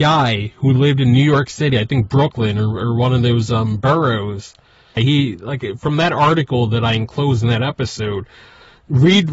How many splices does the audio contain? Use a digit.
1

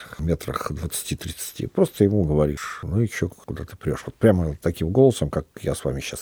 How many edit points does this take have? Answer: 1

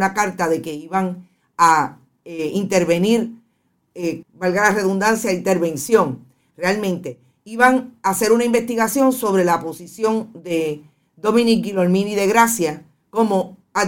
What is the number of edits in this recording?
1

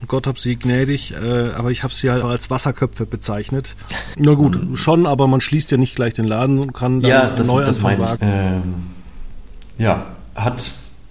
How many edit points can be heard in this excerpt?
3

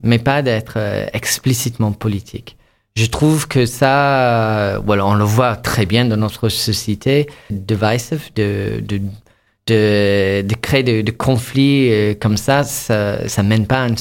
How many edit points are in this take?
1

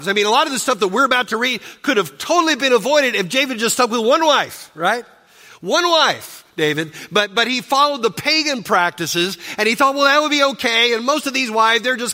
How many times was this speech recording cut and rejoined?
0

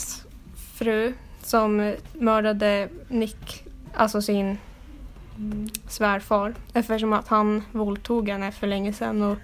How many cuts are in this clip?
1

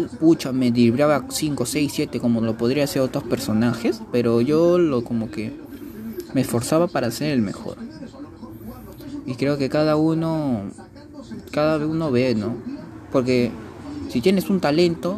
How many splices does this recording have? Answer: 0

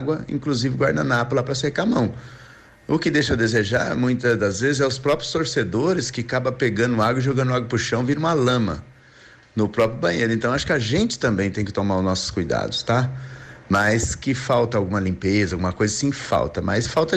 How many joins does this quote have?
0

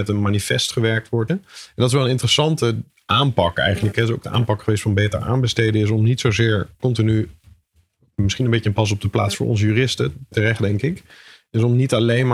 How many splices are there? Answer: 1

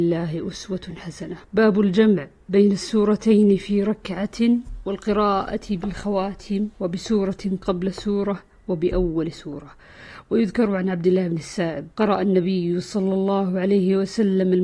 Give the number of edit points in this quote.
3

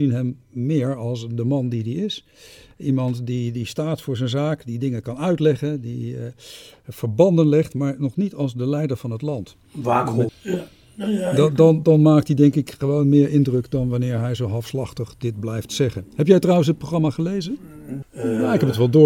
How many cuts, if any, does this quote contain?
2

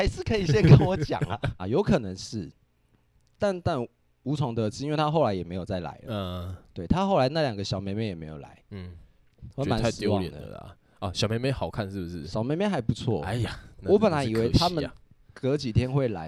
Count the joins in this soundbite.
1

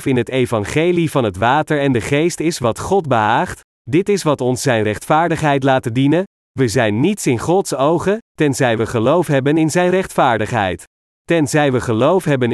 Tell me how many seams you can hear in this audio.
2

